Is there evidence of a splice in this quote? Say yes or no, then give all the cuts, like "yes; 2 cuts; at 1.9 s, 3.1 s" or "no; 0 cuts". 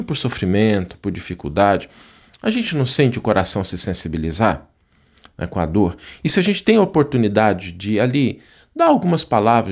no; 0 cuts